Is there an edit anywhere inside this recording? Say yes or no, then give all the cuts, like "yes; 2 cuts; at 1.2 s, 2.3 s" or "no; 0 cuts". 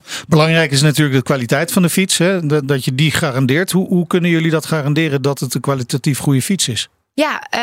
no; 0 cuts